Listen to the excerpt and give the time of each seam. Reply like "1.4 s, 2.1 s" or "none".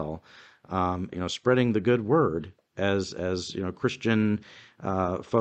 1.1 s